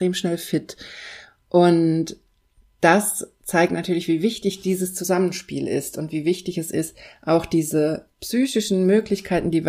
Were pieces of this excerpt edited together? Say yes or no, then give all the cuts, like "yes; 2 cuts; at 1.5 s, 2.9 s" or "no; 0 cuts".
no; 0 cuts